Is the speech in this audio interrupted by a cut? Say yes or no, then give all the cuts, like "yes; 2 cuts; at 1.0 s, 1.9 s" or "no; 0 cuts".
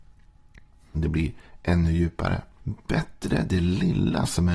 yes; 2 cuts; at 0.9 s, 2.6 s